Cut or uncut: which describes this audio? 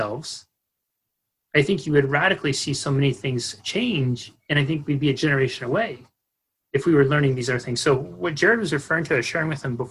uncut